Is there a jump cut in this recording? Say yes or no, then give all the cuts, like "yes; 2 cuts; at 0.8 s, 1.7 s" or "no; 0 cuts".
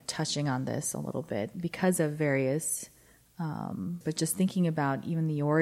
yes; 1 cut; at 4.0 s